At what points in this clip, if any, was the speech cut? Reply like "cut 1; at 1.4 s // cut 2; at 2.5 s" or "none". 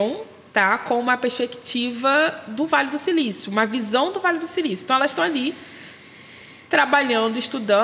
none